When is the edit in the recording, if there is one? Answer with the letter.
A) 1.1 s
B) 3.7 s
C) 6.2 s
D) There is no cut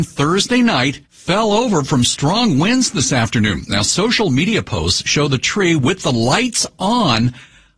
A